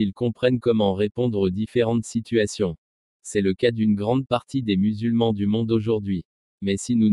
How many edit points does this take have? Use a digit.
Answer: 1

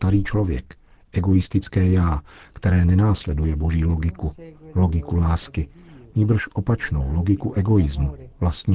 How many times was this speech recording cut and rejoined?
0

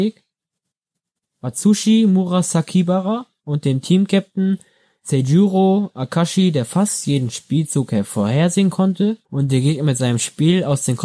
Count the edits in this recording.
2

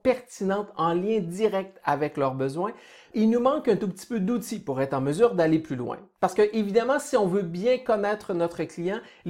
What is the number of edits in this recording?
1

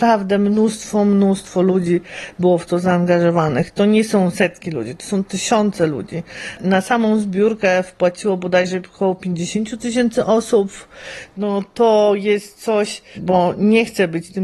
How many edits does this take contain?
2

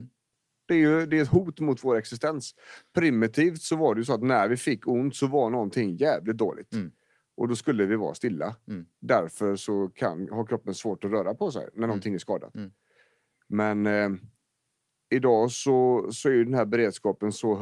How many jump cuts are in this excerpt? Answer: 0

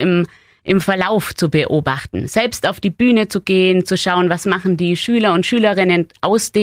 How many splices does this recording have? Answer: 0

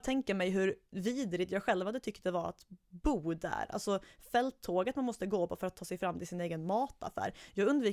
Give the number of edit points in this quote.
0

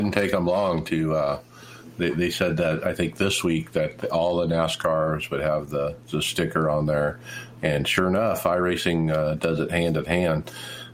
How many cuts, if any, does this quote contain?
0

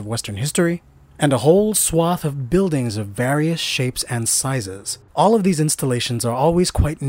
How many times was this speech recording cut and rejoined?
1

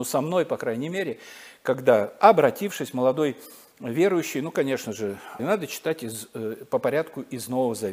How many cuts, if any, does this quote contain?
1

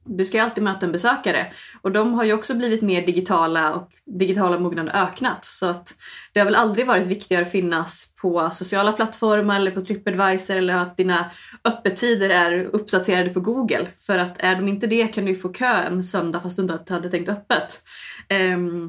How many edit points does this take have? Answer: 0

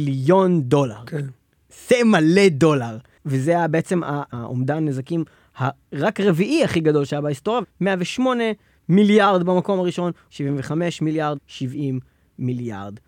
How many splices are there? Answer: 3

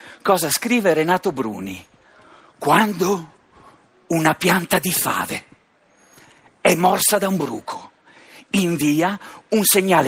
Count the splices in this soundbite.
0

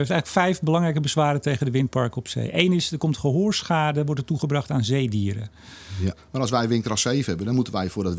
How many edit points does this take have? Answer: 1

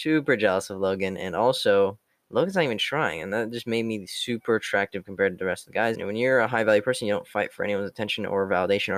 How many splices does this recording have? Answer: 1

